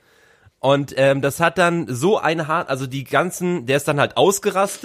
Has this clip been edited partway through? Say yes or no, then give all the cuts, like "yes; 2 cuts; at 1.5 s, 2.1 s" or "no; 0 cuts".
no; 0 cuts